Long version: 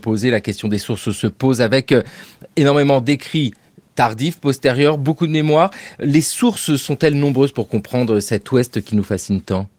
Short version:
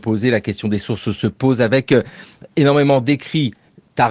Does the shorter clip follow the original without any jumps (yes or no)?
yes